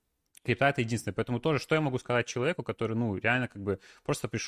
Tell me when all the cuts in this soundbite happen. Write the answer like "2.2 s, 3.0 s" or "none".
none